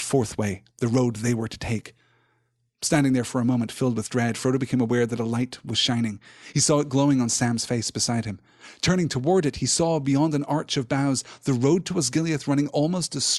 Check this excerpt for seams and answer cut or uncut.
uncut